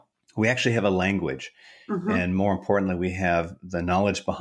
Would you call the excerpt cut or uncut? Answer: uncut